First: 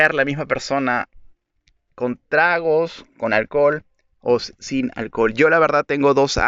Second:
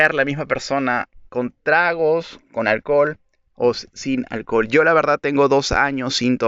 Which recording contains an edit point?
second; 1 cut; at 1.3 s

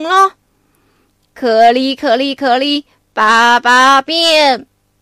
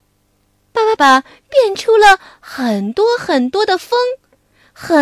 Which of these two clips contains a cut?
second; 1 cut; at 1.0 s

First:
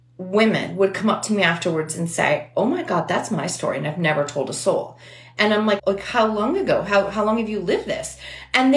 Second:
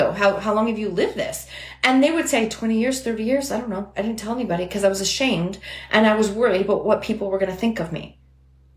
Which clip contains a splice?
first; 1 cut; at 5.8 s

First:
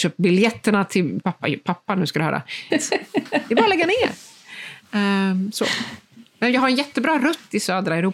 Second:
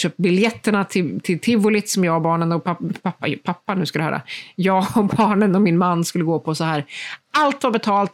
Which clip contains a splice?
first; 2 cuts; at 1.2 s, 2.7 s

